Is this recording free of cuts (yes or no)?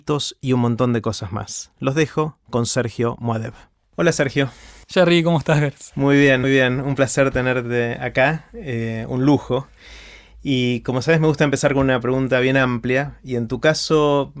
no